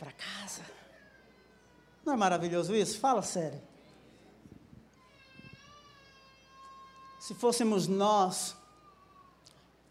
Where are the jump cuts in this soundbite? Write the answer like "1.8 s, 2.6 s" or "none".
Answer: none